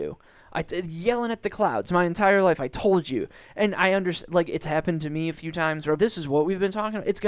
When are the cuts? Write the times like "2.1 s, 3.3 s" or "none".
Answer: 6.0 s